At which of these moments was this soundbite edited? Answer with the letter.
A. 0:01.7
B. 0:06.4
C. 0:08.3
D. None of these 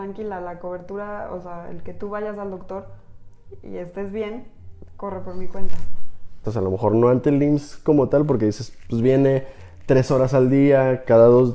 B